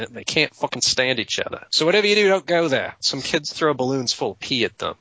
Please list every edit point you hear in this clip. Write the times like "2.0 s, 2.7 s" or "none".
1.7 s, 3.0 s